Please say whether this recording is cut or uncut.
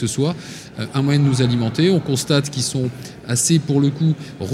uncut